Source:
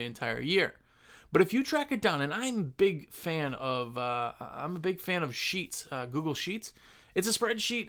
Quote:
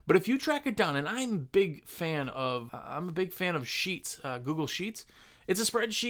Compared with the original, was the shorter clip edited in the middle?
yes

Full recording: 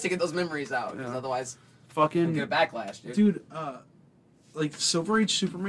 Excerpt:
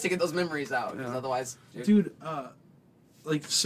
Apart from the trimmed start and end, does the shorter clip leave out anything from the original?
yes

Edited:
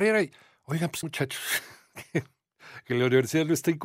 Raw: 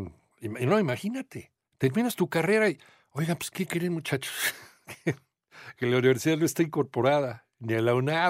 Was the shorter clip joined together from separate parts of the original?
yes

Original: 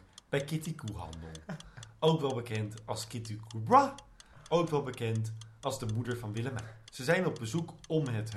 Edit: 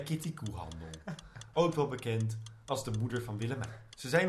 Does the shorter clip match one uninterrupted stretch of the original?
no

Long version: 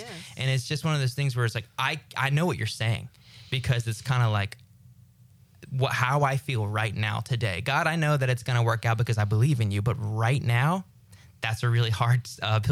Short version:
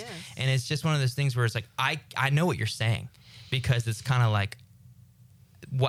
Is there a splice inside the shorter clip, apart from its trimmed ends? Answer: no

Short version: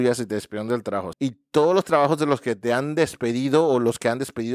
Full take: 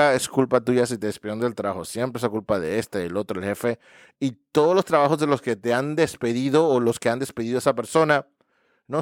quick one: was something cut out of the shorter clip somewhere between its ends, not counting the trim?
yes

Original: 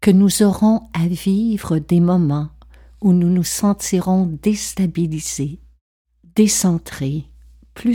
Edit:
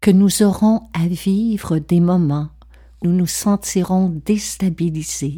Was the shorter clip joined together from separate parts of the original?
yes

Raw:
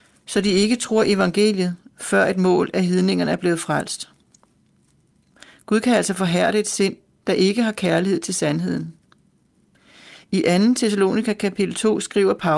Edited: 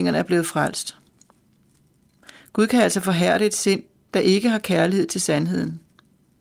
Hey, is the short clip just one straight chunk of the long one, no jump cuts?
yes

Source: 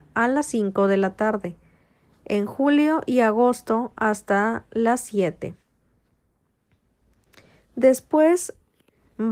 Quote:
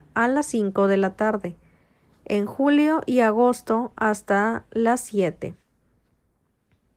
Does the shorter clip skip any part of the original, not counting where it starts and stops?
no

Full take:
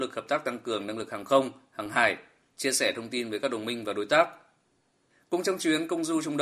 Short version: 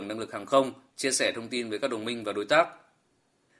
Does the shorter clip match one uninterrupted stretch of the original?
no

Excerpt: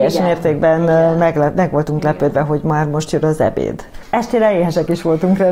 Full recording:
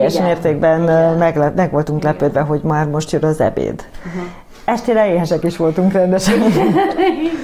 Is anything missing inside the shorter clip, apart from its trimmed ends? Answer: yes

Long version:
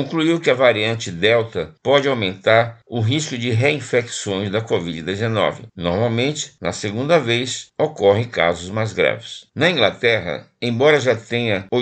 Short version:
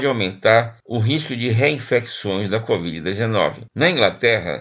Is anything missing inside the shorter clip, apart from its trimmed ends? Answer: yes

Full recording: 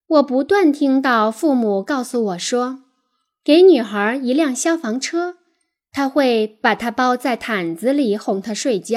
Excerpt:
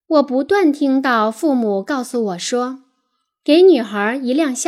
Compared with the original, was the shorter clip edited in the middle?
no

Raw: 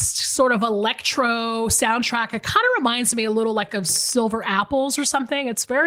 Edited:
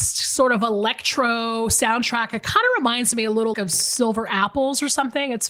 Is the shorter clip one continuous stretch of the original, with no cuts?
no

